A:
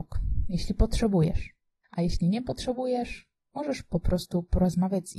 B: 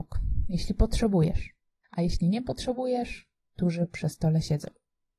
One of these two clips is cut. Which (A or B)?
B